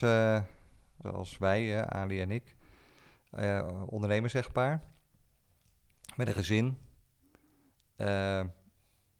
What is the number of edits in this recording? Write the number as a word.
one